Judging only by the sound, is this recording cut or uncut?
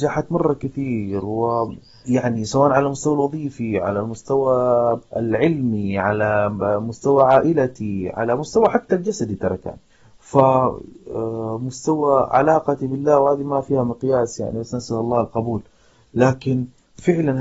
cut